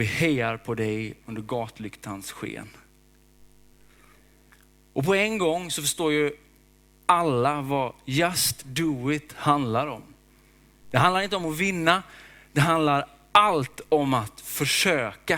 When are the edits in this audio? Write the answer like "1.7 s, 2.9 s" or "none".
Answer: none